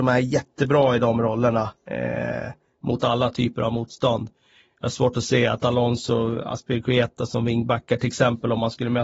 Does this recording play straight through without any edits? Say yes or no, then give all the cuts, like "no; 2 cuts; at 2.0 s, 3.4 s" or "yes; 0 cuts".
yes; 0 cuts